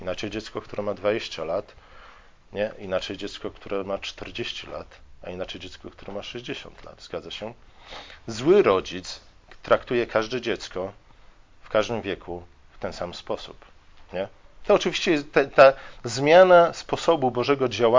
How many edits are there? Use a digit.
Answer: 1